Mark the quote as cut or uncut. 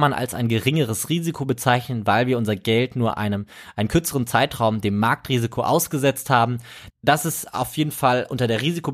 cut